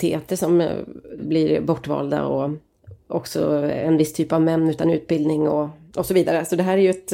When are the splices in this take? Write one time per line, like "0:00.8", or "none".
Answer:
0:01.2